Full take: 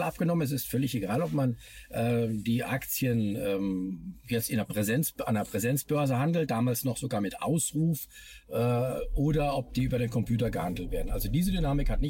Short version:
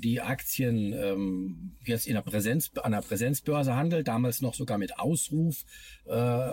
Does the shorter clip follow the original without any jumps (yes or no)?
yes